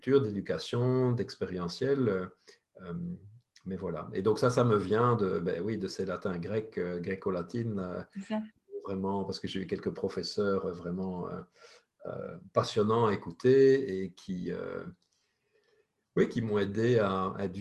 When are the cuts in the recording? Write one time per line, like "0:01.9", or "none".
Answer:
none